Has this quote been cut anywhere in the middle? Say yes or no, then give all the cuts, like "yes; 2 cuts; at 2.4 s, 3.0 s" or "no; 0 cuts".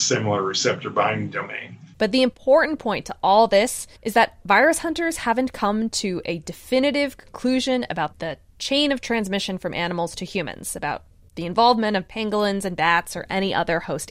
yes; 2 cuts; at 1.9 s, 4.0 s